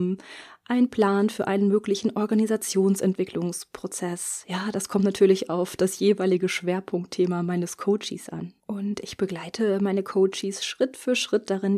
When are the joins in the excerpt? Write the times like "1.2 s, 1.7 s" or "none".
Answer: none